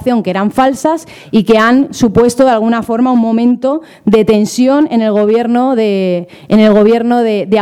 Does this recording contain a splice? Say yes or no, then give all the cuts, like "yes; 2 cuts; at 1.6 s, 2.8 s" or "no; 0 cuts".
no; 0 cuts